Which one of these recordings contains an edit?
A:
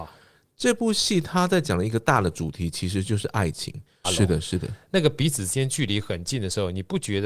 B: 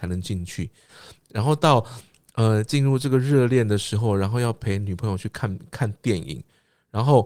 A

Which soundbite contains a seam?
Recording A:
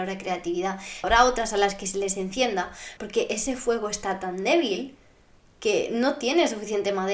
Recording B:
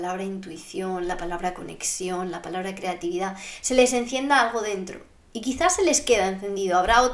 A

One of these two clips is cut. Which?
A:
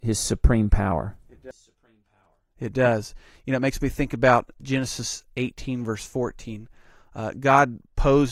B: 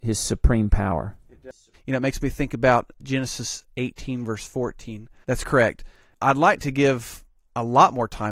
B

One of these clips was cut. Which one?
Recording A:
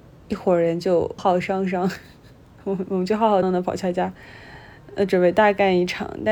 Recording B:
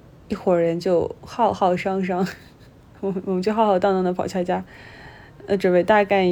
A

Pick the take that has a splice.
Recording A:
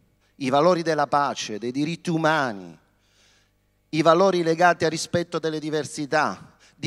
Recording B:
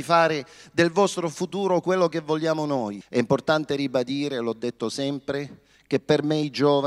B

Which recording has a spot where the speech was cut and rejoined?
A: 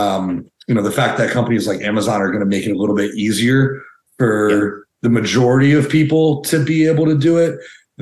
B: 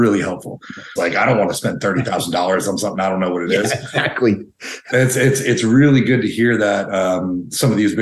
B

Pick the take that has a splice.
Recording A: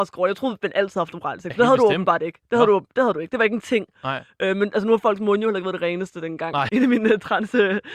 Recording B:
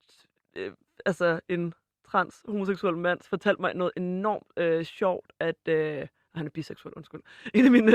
A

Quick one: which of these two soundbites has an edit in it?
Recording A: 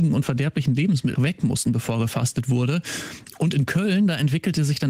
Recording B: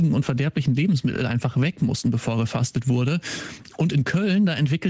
A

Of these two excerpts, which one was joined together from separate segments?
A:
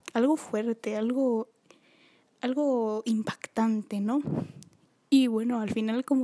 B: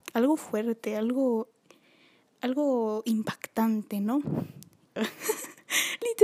B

